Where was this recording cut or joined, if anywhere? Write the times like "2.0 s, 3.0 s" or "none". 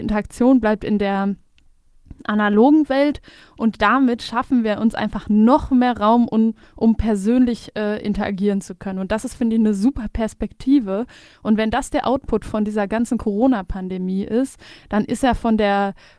none